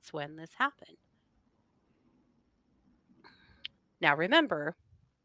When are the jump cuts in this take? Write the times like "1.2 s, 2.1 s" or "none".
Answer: 4.0 s

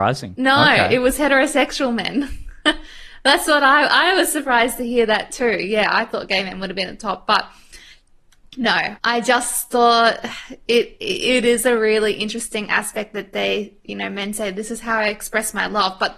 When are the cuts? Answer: 9.0 s

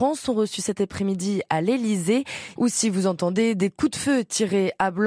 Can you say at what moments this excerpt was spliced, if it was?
2.6 s

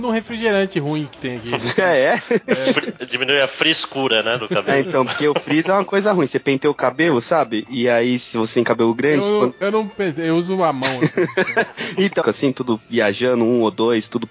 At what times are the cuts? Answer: 12.2 s

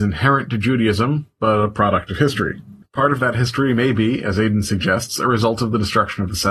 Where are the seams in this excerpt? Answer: none

